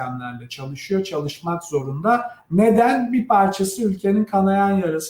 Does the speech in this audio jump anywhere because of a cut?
no; 0 cuts

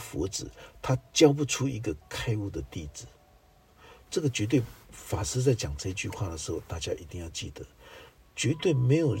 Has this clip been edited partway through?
no; 0 cuts

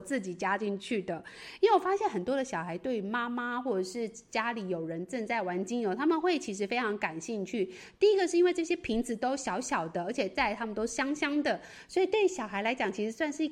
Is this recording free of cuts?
yes; 0 cuts

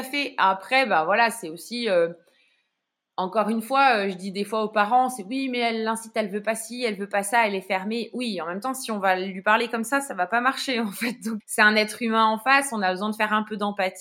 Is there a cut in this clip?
yes; 1 cut; at 11.4 s

